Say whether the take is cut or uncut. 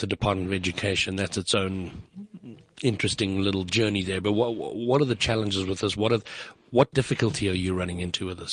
uncut